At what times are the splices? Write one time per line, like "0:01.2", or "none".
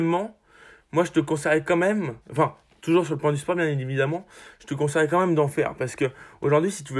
0:02.2